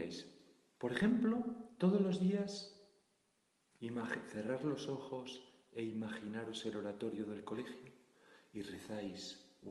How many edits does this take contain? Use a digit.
0